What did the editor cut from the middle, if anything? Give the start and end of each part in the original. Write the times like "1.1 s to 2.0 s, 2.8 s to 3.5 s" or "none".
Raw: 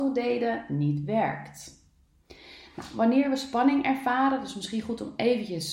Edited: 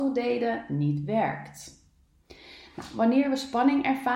none